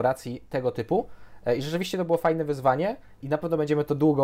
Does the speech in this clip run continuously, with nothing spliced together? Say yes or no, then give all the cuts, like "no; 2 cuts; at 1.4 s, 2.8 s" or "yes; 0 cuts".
no; 1 cut; at 3.2 s